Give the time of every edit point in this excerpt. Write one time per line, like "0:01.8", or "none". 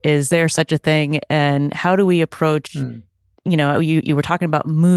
0:03.4